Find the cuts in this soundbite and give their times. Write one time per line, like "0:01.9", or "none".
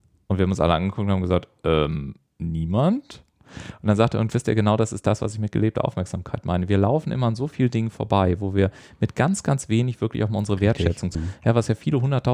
0:11.1